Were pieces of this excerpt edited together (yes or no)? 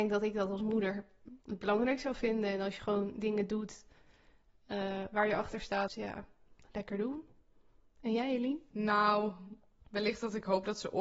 yes